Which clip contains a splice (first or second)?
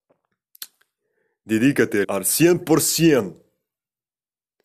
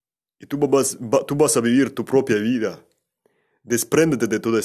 first